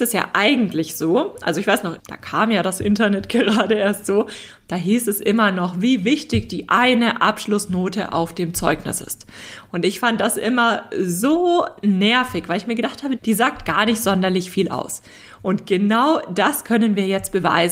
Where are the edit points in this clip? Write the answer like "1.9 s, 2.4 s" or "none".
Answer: 2.0 s, 13.2 s